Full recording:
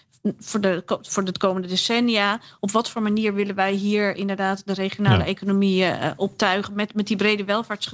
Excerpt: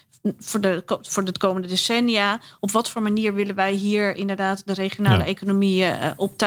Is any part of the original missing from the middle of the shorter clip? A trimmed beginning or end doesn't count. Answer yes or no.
no